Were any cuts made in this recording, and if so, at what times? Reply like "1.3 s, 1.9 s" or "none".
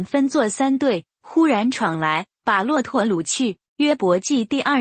3.7 s